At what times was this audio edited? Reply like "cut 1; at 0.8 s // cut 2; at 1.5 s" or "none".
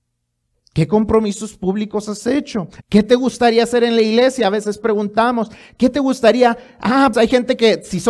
cut 1; at 2.8 s // cut 2; at 7.1 s